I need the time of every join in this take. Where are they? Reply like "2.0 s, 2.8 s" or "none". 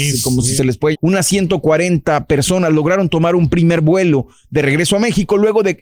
0.9 s

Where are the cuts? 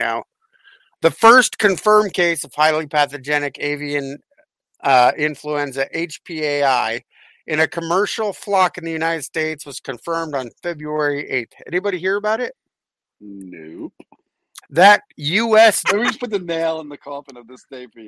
14.6 s, 15.8 s

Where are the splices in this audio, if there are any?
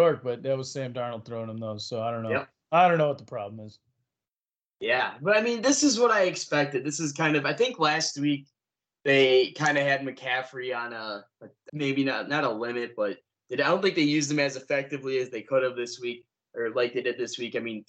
11.7 s

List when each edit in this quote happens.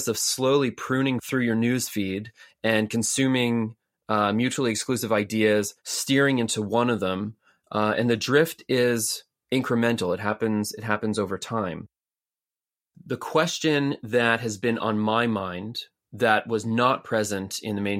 5.8 s

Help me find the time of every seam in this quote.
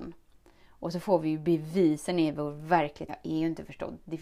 3.1 s

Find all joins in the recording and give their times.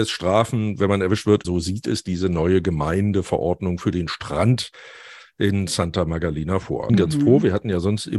1.4 s, 6.9 s

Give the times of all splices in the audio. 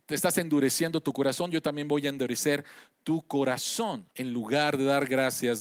4.1 s

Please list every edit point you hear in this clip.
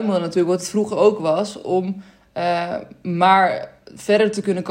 none

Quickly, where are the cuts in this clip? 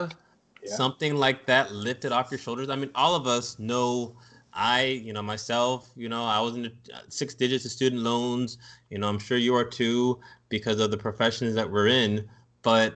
none

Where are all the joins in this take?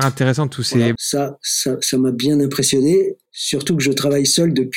1.0 s, 3.3 s

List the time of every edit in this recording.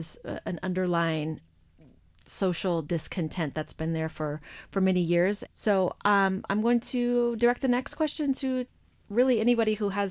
5.5 s

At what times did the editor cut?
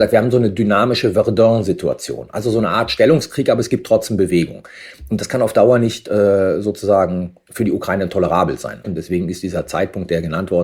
8.8 s

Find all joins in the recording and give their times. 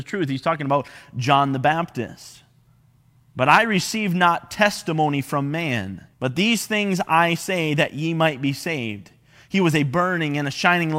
6.1 s

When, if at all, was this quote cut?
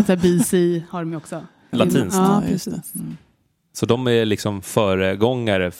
1.7 s

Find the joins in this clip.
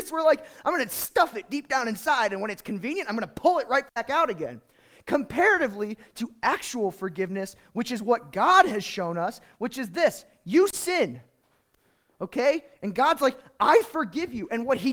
none

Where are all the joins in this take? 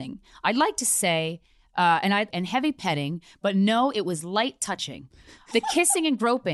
2.3 s, 5.5 s

